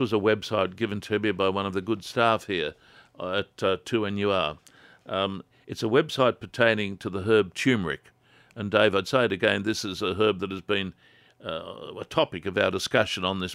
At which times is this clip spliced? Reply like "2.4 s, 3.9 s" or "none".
none